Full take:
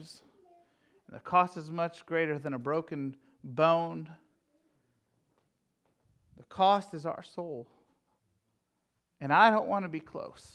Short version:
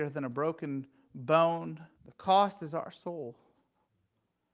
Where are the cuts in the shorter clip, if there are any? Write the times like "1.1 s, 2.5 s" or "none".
1.9 s